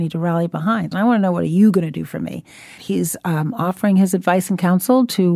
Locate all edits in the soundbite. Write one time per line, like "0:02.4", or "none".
0:00.9
0:02.8